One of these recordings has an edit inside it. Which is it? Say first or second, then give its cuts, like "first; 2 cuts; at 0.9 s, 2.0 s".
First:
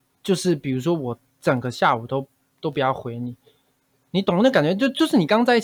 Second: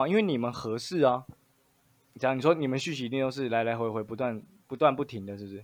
second; 1 cut; at 2.1 s